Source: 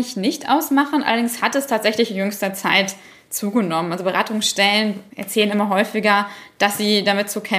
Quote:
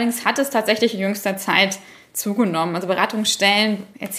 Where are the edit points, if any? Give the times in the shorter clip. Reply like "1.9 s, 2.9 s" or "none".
none